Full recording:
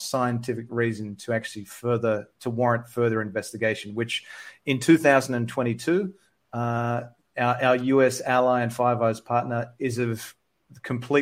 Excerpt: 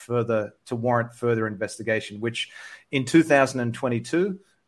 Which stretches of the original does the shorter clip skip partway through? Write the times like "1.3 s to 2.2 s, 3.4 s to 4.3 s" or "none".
none